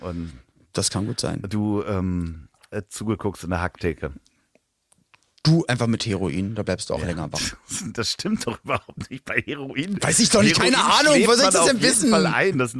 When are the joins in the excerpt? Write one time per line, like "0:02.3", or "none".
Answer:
none

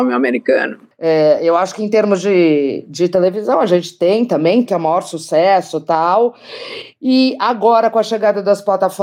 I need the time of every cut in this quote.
0:04.7

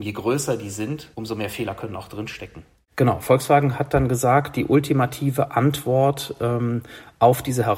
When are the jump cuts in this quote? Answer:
0:01.1
0:02.8

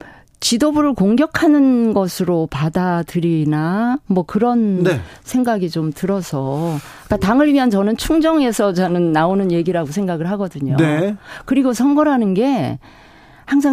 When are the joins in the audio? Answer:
none

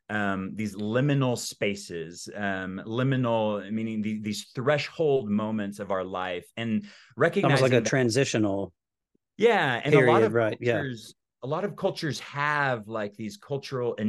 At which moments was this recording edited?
none

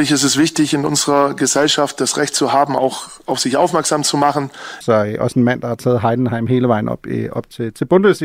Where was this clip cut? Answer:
0:04.8

